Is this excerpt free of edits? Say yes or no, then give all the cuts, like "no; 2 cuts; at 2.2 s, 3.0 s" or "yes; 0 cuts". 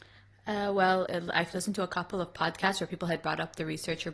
no; 1 cut; at 1.1 s